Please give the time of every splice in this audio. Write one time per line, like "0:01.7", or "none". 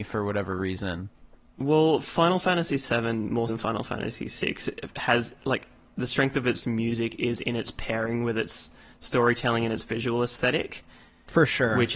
0:03.5